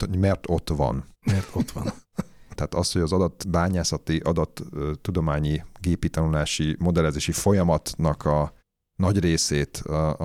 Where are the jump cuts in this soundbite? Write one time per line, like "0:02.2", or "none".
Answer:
0:02.5